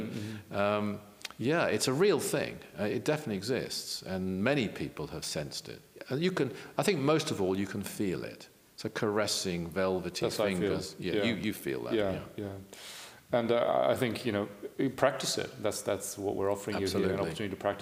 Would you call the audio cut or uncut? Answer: uncut